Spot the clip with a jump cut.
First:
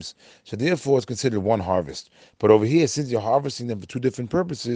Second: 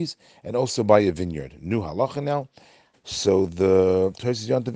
second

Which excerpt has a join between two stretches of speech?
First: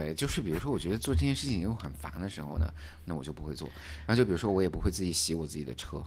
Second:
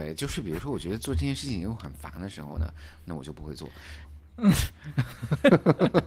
second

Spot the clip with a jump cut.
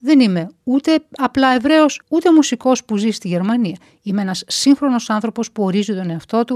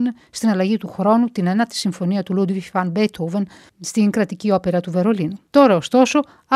first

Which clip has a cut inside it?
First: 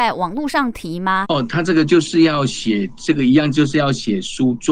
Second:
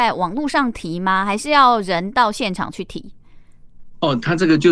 first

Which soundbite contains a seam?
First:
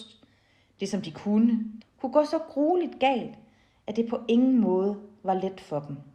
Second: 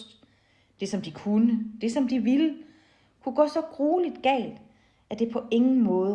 first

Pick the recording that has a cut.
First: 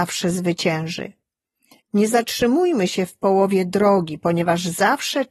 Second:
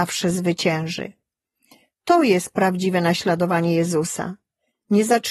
first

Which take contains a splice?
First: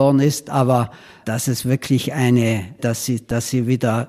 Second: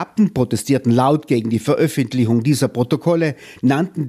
first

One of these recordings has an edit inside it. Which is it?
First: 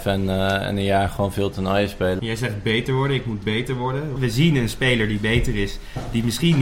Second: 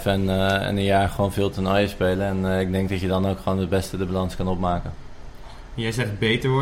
first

